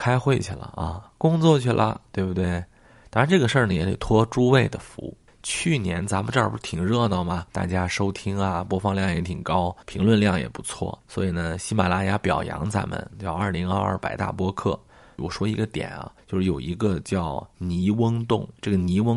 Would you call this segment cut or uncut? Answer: cut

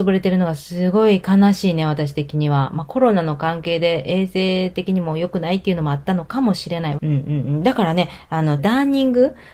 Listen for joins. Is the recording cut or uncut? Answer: cut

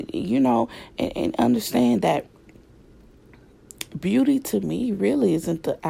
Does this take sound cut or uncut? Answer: uncut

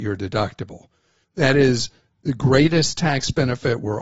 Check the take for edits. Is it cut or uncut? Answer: cut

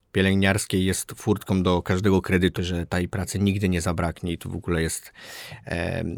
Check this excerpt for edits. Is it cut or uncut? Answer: cut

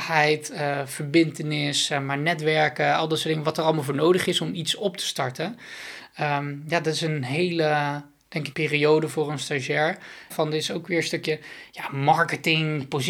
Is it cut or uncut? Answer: cut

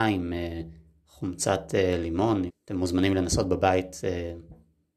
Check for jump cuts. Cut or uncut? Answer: cut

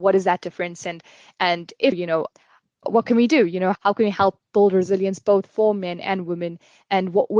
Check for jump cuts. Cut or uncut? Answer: cut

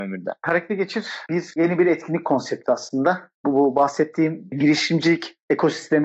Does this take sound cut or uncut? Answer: uncut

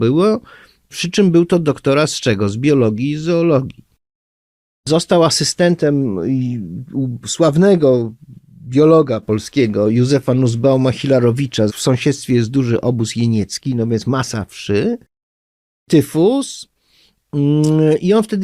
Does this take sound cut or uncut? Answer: cut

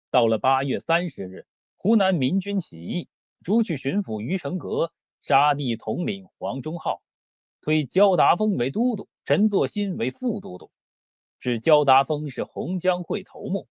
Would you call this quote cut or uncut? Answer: uncut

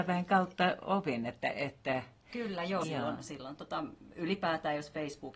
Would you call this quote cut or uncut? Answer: cut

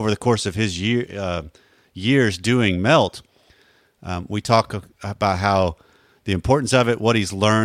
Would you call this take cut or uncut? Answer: uncut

